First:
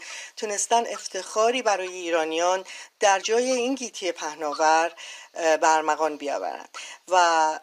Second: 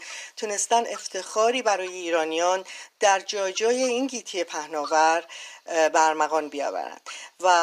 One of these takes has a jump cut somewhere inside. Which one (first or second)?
first